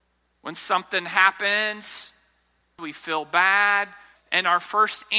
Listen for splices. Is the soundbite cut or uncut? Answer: cut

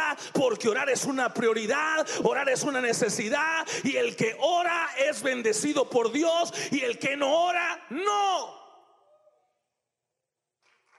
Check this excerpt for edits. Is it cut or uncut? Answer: cut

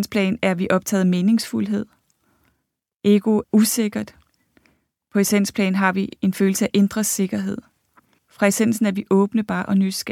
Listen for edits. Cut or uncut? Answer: cut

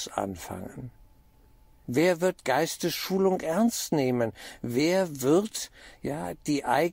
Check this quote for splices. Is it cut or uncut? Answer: cut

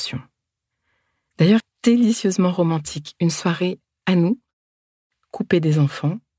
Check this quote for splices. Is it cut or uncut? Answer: cut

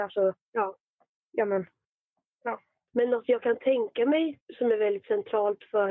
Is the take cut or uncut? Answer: uncut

